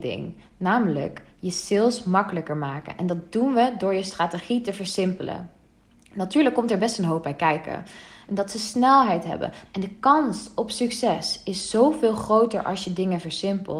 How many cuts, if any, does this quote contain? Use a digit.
2